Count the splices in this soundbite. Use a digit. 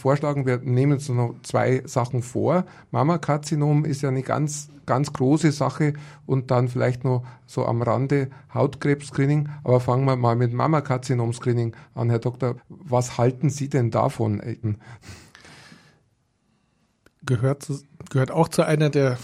2